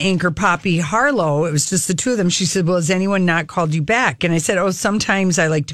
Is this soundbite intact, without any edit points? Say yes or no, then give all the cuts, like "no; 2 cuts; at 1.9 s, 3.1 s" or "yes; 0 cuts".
no; 1 cut; at 4.2 s